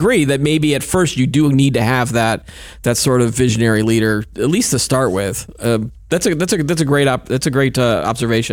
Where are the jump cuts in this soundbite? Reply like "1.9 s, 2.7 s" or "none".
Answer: none

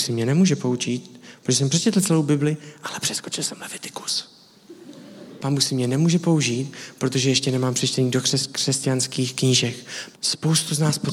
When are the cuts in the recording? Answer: 10.1 s

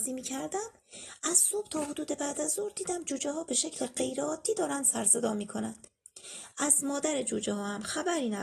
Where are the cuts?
none

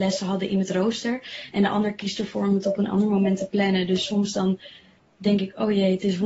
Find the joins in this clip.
none

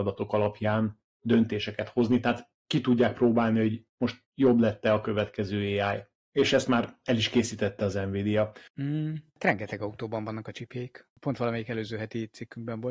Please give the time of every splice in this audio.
8.7 s

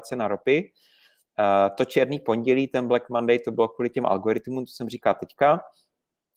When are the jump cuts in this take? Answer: none

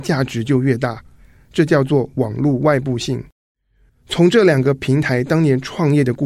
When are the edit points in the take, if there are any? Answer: 3.9 s

